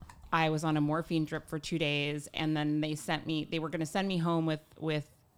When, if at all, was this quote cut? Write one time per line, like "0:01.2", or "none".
none